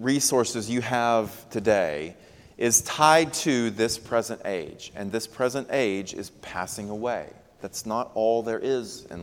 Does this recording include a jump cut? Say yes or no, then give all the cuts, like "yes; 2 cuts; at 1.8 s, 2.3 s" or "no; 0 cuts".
yes; 1 cut; at 7.6 s